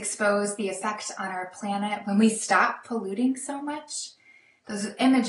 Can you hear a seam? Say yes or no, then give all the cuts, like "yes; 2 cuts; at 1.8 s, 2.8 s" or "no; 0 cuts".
no; 0 cuts